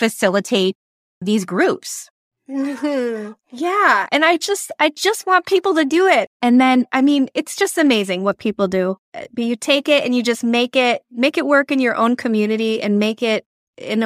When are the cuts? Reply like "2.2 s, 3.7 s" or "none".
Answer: 6.3 s